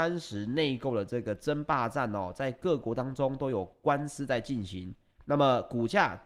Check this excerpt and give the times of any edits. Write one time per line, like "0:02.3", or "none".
0:05.2